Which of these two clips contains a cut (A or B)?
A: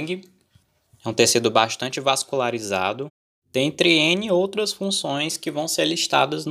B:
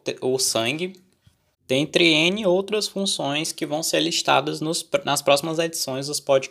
B